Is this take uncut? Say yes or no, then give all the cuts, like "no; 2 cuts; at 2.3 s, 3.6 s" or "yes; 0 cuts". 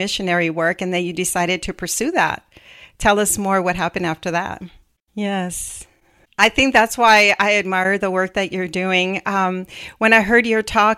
no; 1 cut; at 5.0 s